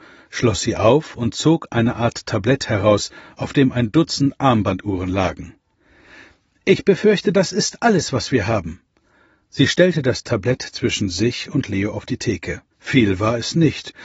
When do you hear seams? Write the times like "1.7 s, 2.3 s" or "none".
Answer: 12.7 s